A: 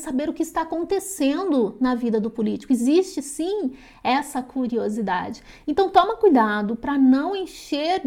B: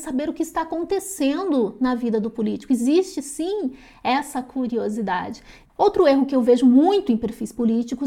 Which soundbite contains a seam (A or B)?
B